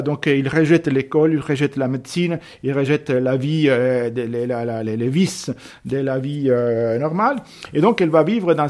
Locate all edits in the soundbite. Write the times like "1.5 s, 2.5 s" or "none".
none